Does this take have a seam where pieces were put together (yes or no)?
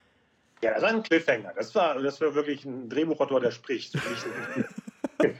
no